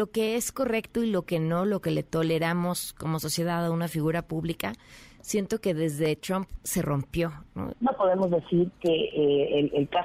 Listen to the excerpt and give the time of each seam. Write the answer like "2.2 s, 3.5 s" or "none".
7.7 s